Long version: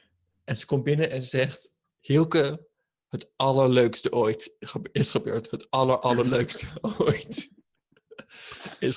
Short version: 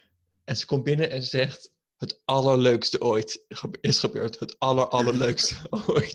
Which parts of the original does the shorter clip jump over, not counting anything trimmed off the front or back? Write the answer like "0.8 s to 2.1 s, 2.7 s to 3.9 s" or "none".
1.8 s to 2.9 s